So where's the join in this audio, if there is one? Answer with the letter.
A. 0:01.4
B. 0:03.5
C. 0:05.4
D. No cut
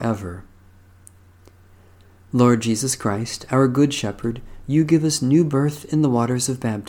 D